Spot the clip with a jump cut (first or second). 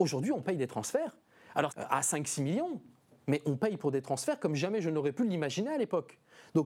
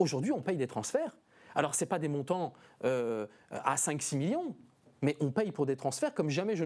first